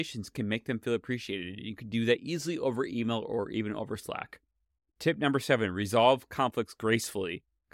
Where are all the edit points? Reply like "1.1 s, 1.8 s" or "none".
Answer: none

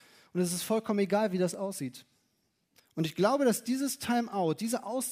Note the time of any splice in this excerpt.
2.8 s

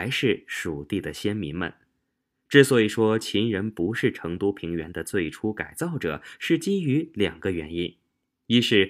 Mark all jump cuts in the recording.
none

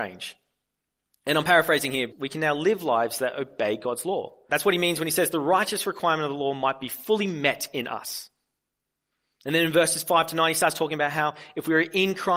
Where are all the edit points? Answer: 2.1 s, 4.5 s

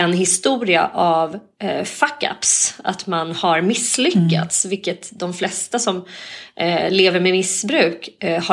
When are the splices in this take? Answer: none

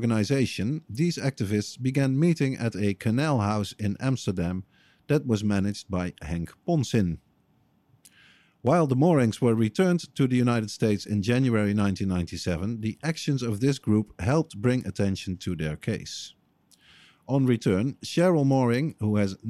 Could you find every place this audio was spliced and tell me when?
none

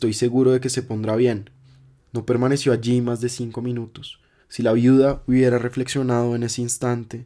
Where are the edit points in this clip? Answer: 2.0 s, 4.4 s

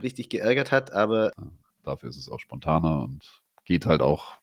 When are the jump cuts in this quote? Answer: 1.3 s

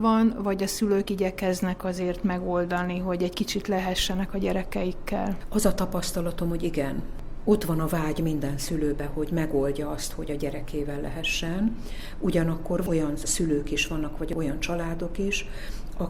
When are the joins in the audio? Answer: none

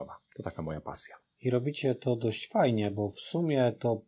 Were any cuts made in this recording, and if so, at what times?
none

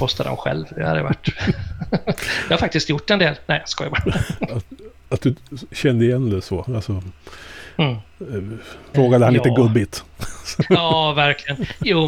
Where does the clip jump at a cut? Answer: 4.5 s, 6.7 s, 8.9 s

